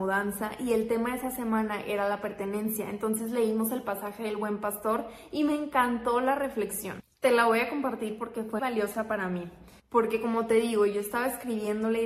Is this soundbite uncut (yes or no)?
no